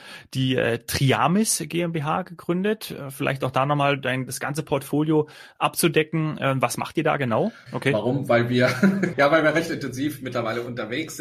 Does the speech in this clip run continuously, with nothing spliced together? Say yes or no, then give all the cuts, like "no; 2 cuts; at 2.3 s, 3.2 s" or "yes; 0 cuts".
no; 2 cuts; at 7.7 s, 9.1 s